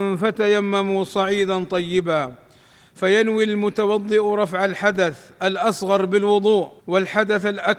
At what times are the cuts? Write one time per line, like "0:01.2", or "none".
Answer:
0:06.8